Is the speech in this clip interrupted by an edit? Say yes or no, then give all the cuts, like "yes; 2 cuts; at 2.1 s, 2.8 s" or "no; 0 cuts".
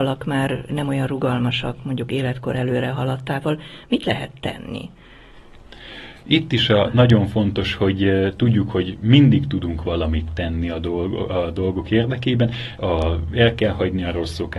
yes; 1 cut; at 12.8 s